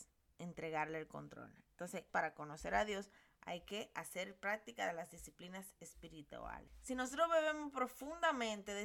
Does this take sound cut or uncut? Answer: cut